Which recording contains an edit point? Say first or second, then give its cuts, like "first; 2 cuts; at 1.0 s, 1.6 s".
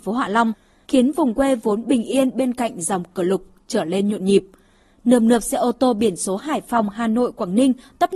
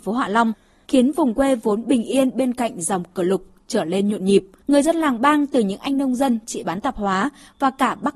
second; 1 cut; at 4.6 s